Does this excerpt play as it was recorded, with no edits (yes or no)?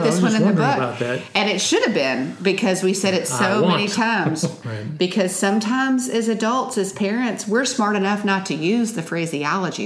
no